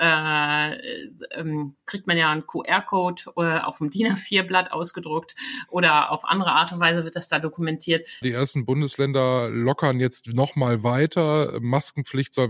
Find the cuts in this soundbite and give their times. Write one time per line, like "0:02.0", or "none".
0:08.2